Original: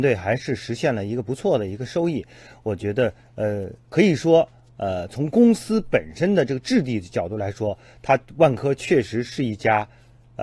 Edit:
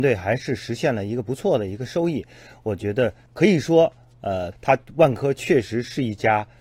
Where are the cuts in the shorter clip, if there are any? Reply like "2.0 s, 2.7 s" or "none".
3.3 s, 4.5 s